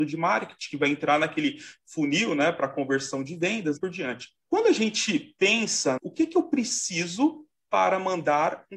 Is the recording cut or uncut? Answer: cut